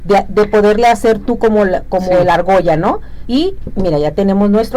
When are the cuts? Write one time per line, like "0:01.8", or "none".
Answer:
0:03.2

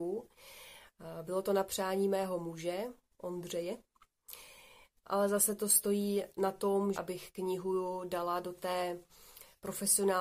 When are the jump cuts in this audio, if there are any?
0:05.0
0:06.9

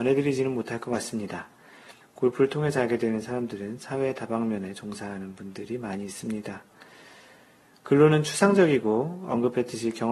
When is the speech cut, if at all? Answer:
0:02.0

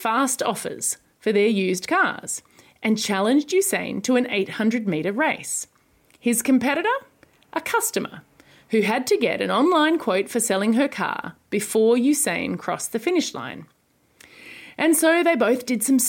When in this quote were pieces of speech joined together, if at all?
none

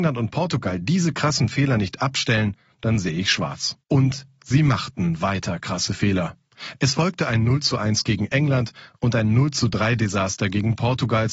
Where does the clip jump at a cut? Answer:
0:03.8

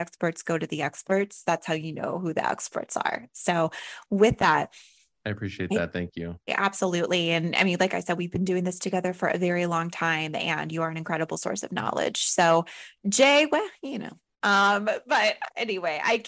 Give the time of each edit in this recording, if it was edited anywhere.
0:06.5

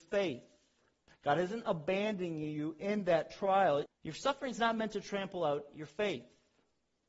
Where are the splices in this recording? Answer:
0:03.9

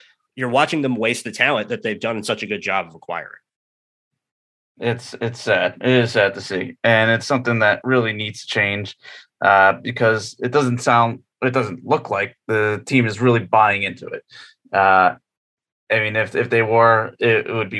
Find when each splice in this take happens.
none

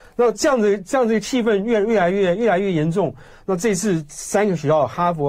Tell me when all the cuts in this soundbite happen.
0:03.3

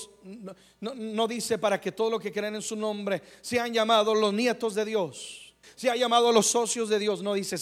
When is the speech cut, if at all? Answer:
0:05.6

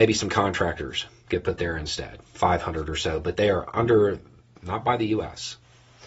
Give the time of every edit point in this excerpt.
0:04.6

